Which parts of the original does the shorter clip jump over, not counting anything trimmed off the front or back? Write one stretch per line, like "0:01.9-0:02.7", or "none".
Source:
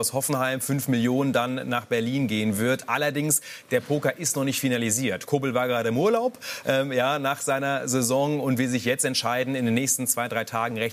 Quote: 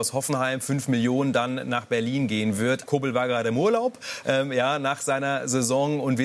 0:02.9-0:05.3

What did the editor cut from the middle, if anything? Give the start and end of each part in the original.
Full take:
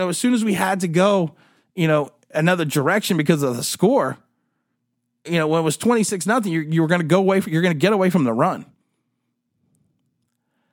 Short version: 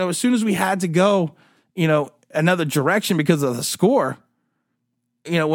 none

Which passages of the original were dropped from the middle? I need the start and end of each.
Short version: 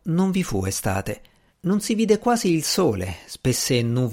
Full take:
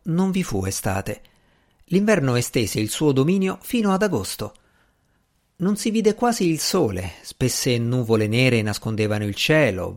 0:01.5-0:05.5

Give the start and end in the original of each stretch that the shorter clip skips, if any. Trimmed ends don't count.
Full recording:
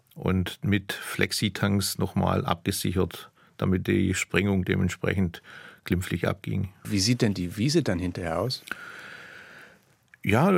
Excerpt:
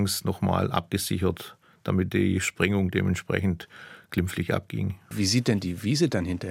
none

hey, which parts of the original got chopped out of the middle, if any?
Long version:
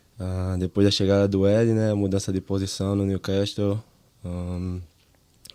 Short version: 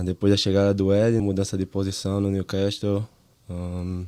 0:01.7-0:01.9

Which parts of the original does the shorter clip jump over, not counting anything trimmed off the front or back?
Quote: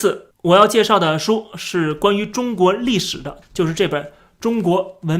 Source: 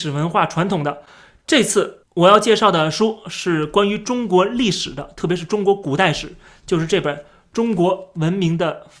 0:05.1-0:06.5

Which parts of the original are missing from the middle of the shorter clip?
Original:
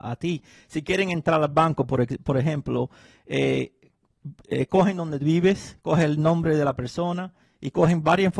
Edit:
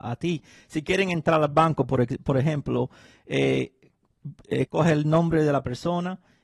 0:04.7-0:05.8

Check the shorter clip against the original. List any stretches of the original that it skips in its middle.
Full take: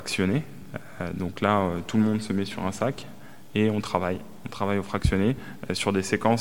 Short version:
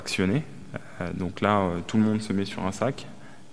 none

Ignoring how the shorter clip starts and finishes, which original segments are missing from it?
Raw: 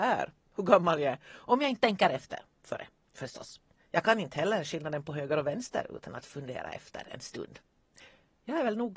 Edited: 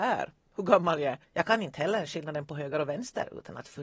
0:01.2-0:03.8

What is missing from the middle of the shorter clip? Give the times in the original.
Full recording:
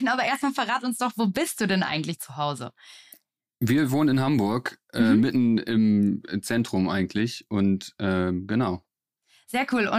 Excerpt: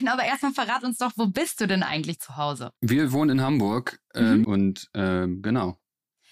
0:02.8-0:03.5
0:05.2-0:07.5

